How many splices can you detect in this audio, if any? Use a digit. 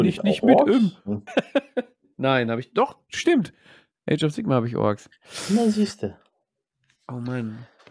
1